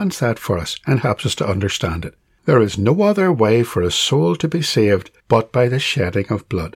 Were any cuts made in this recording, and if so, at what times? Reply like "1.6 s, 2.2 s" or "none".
2.4 s, 5.2 s

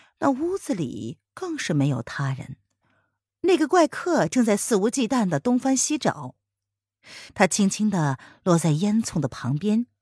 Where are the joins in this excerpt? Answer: 7.3 s

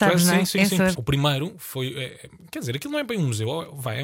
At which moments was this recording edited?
0.9 s

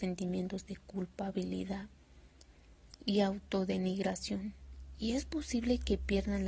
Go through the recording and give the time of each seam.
none

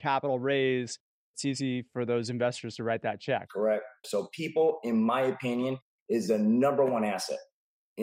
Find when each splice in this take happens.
4.0 s

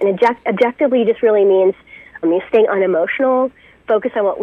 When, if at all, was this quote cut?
2.2 s

